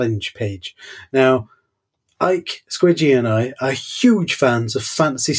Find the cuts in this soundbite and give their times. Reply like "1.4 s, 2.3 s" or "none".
none